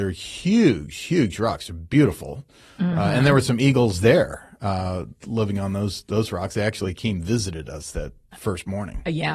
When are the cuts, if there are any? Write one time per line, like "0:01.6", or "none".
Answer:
none